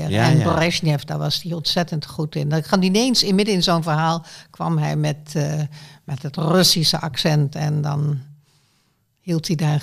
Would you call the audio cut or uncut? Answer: uncut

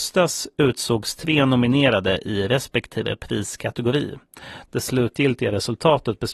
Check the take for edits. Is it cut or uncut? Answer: cut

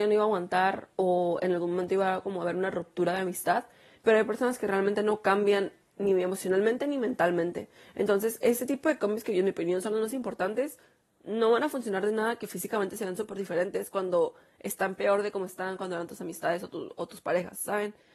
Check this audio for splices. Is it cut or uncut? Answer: cut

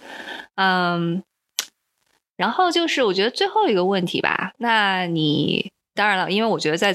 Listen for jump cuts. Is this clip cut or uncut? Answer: uncut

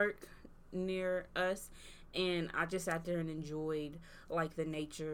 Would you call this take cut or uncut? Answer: uncut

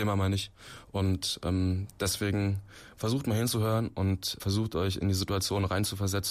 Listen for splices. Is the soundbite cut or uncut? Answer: cut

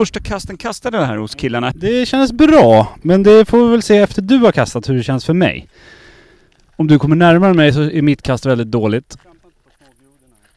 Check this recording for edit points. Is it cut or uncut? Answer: cut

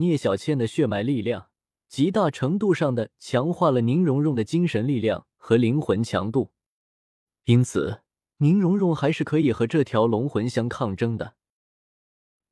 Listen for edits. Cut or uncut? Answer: cut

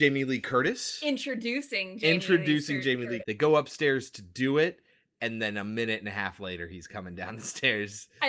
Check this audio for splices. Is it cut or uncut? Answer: cut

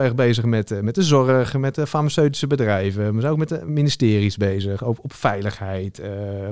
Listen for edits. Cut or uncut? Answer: uncut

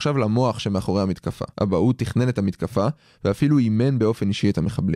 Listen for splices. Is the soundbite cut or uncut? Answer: cut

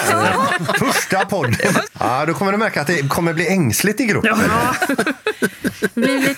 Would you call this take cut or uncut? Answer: cut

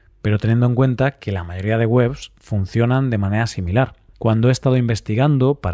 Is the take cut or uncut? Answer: cut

